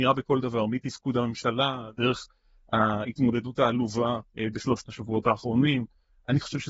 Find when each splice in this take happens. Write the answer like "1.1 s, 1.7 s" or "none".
1.9 s, 4.3 s